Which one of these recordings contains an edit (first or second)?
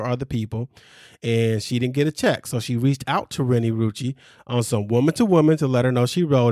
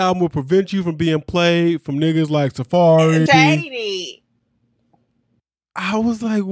second